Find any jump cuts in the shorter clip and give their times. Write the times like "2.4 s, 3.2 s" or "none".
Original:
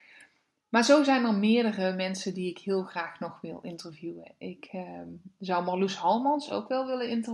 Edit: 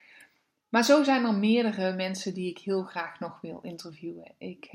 none